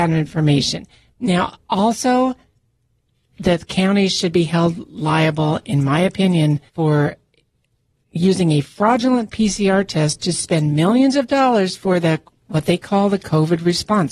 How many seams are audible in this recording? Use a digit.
1